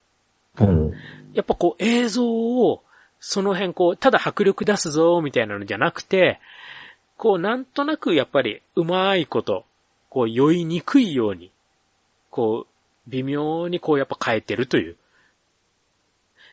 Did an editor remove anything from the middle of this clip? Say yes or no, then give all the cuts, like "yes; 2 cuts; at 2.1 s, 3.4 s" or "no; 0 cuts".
no; 0 cuts